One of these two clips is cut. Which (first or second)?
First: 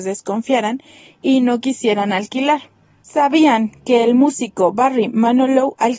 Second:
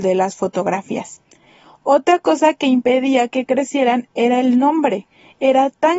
first